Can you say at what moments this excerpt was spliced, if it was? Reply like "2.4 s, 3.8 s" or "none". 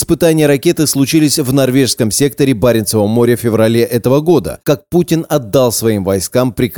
4.6 s